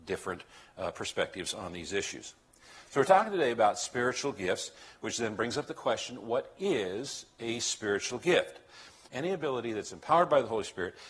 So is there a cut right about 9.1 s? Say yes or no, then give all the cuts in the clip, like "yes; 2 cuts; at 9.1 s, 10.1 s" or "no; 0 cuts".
yes; 1 cut; at 9.1 s